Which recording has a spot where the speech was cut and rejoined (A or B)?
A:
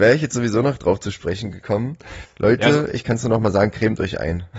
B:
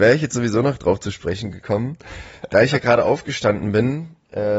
A